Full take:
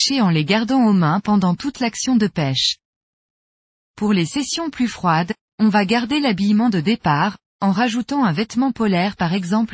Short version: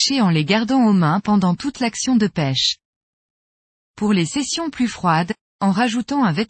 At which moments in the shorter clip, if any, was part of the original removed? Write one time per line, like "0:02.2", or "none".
0:05.5